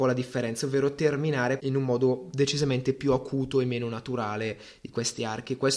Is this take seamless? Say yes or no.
no